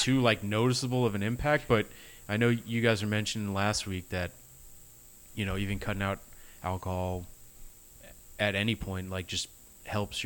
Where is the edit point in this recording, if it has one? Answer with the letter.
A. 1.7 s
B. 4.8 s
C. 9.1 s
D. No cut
D